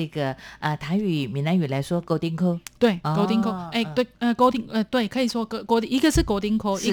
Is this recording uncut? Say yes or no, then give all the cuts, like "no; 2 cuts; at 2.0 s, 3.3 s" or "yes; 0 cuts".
yes; 0 cuts